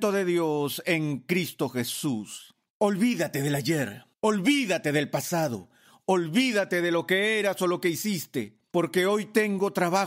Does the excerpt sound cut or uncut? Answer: uncut